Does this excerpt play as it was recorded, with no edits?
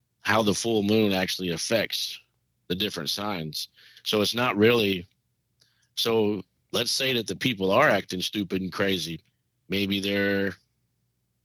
yes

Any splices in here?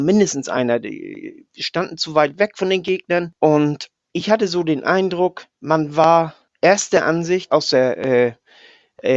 yes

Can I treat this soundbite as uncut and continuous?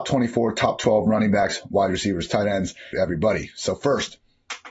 no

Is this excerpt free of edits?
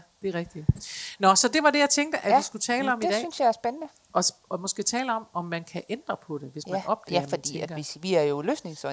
yes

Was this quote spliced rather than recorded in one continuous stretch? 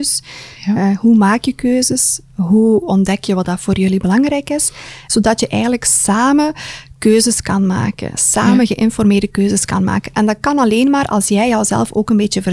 yes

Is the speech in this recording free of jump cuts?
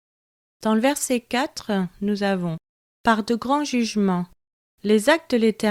yes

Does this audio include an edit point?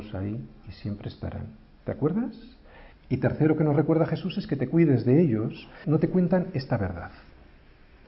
yes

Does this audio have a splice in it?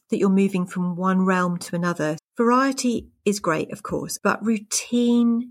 yes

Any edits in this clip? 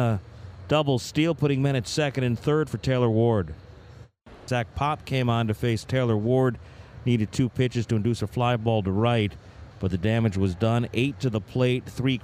yes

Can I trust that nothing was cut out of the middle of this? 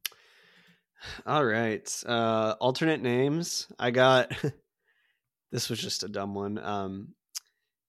yes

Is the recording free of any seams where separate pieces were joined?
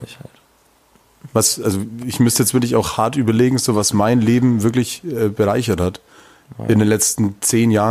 yes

